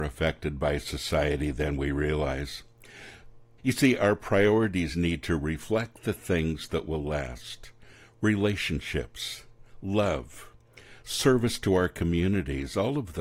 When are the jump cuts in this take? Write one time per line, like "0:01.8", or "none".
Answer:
0:03.6